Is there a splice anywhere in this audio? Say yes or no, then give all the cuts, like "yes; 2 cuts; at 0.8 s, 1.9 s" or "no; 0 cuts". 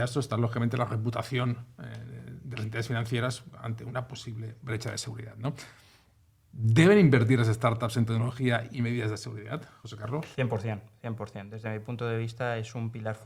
no; 0 cuts